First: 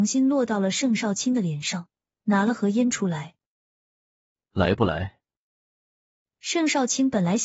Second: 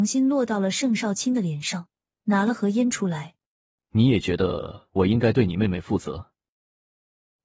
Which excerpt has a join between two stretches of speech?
second; 1 cut; at 3.8 s

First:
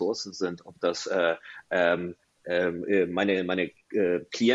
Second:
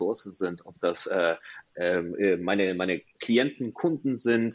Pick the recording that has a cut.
second; 2 cuts; at 1.7 s, 3.1 s

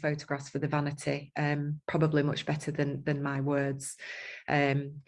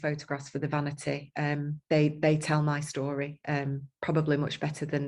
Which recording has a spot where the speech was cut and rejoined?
first; 1 cut; at 1.8 s

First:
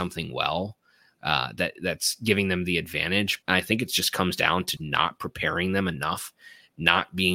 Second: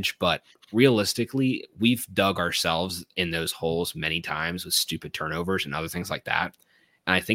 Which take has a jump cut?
first; 2 cuts; at 3.4 s, 4.8 s

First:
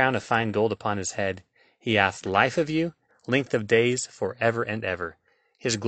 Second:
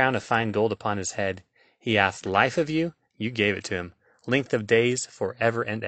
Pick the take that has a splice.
first; 1 cut; at 3.1 s

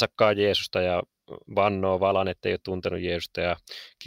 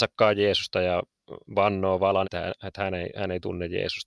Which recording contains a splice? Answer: second; 1 cut; at 2.2 s

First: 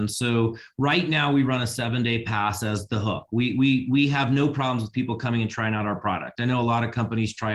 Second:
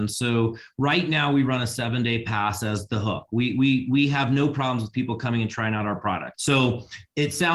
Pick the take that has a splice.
second; 1 cut; at 6.3 s

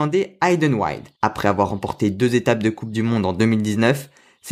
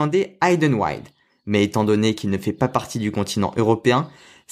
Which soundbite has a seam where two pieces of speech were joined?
first; 1 cut; at 1.2 s

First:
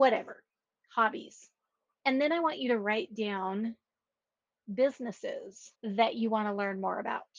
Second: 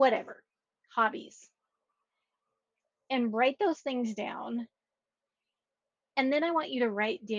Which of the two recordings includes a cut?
first; 2 cuts; at 1.9 s, 5.7 s

